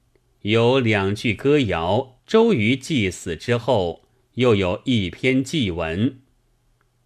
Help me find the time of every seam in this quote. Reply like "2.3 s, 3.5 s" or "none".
2.2 s